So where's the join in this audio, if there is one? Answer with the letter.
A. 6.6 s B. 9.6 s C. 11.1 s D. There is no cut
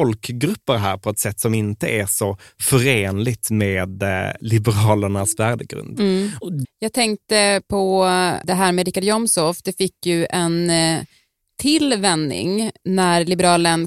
A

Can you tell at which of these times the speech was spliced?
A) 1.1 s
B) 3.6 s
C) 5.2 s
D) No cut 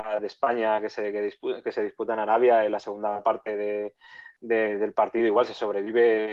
D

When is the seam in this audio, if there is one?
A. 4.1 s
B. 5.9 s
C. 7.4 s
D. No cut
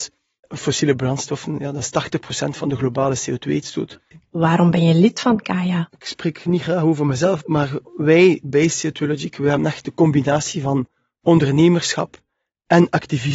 A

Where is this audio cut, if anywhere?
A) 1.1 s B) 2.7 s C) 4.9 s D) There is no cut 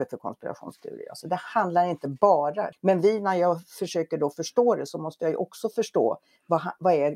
B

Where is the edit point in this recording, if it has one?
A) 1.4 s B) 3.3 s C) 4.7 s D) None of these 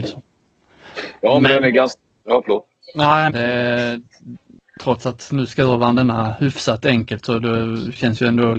B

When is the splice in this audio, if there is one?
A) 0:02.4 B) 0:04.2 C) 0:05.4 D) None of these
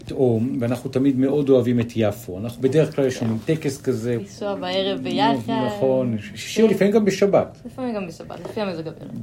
B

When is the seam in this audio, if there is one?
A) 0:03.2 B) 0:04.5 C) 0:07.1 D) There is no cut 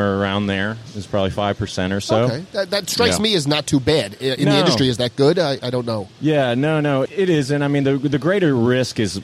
C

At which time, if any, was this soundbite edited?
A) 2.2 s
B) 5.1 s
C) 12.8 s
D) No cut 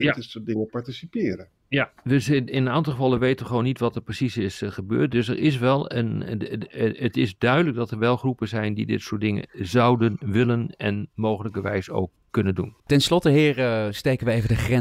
C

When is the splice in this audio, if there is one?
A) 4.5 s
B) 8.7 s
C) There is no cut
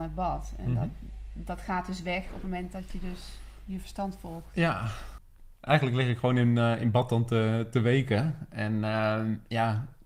C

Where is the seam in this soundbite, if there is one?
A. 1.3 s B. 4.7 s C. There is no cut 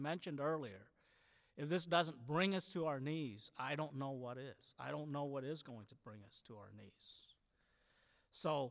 C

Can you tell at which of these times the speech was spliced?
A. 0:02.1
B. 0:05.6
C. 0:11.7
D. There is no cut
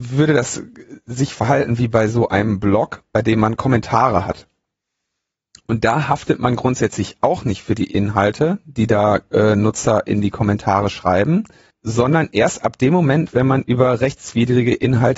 C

